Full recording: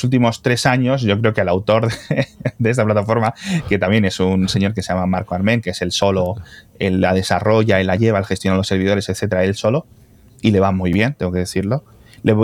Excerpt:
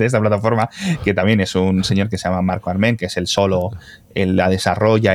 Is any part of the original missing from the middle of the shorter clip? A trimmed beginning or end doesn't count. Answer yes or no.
no